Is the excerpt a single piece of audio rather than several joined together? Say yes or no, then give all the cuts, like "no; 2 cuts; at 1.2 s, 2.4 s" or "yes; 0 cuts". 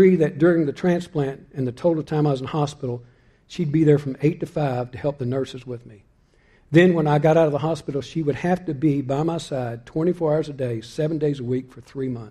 yes; 0 cuts